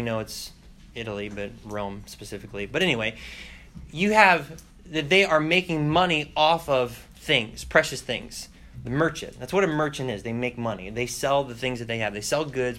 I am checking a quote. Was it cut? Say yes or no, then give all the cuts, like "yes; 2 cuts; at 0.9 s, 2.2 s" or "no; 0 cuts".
no; 0 cuts